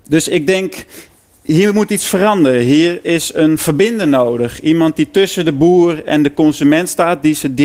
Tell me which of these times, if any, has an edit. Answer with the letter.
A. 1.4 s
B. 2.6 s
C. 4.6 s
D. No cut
D